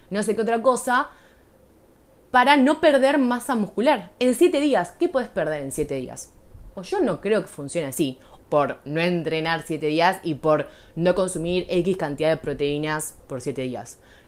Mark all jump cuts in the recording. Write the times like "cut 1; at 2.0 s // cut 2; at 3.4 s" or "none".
cut 1; at 6.7 s // cut 2; at 8.4 s